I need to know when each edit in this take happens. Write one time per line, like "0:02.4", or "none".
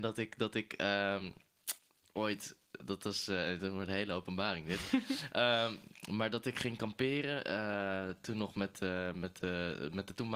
none

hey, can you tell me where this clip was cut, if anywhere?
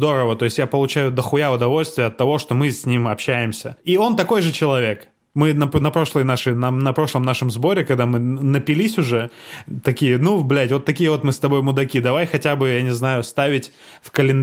none

